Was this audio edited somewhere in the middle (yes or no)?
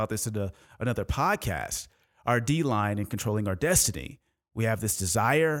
no